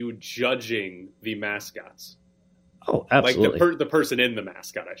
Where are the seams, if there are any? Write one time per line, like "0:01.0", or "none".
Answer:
none